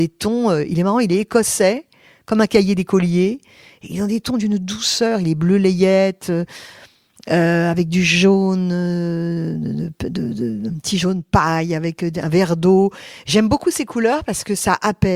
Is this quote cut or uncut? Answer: uncut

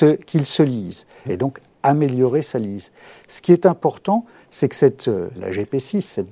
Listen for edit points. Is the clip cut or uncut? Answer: cut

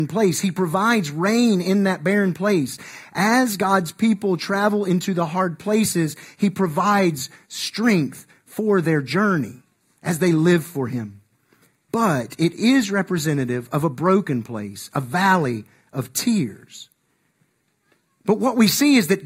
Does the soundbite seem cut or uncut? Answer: cut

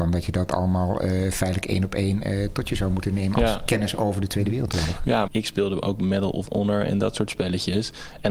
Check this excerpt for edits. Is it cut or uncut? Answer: cut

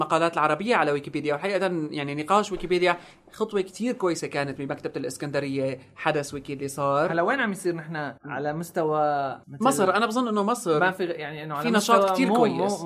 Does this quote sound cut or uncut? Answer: cut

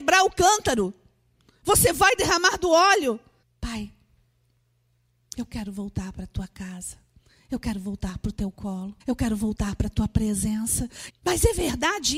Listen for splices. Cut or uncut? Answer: cut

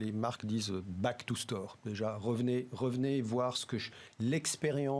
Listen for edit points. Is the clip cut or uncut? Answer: uncut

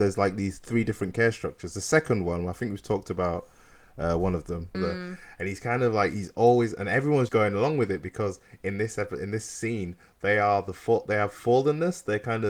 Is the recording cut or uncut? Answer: cut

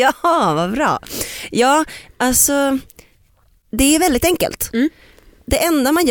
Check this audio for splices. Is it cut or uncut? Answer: uncut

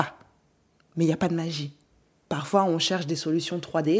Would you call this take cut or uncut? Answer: uncut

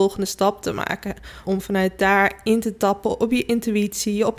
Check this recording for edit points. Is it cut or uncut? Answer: cut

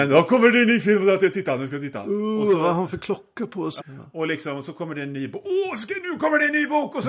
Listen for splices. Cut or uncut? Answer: cut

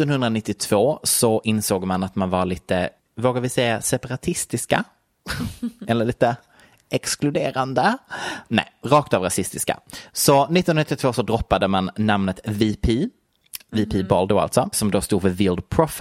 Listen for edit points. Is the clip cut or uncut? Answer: cut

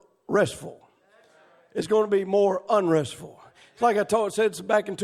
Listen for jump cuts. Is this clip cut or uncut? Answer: uncut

